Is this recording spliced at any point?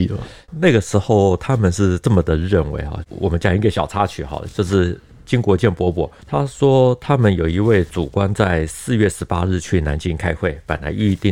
no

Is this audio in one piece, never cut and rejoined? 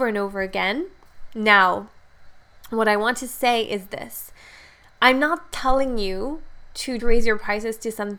no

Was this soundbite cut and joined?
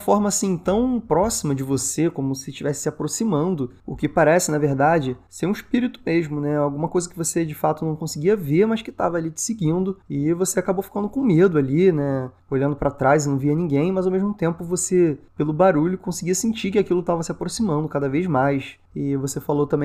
no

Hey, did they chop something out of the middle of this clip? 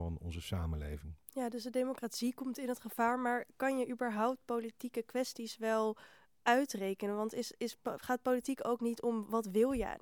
no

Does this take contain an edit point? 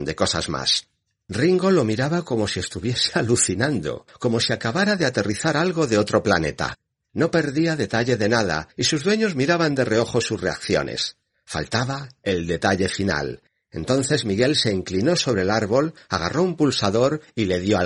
no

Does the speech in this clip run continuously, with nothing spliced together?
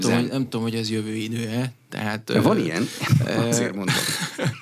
yes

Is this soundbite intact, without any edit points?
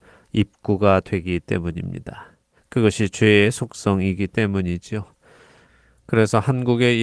no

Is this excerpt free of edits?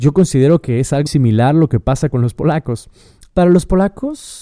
no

